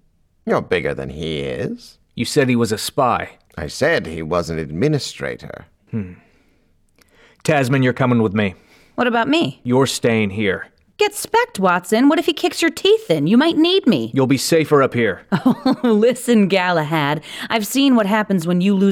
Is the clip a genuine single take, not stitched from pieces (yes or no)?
no